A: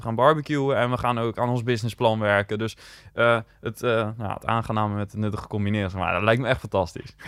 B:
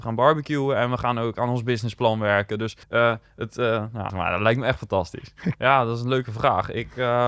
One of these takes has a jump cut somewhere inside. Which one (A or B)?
B